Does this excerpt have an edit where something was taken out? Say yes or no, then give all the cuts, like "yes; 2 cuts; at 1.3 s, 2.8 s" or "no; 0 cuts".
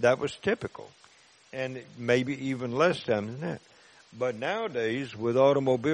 no; 0 cuts